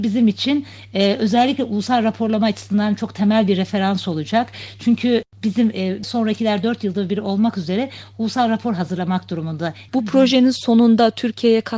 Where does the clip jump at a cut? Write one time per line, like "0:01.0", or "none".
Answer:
0:06.0
0:09.9